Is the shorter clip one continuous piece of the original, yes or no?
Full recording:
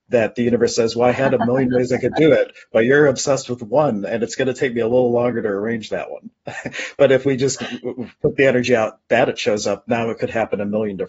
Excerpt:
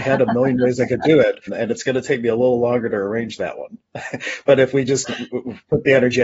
no